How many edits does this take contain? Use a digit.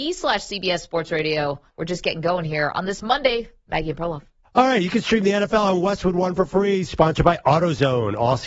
1